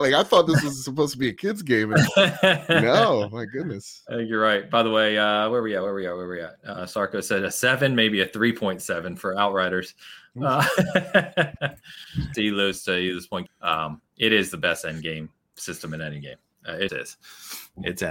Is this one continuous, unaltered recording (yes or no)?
no